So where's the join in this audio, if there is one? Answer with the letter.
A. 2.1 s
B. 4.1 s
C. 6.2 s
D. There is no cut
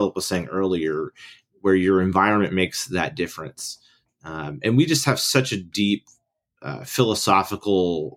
D